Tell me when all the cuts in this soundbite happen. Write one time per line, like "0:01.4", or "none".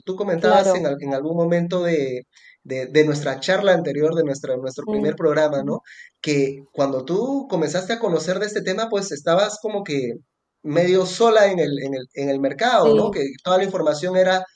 none